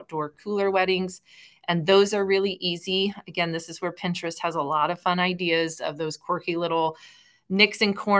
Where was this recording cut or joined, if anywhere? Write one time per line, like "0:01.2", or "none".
none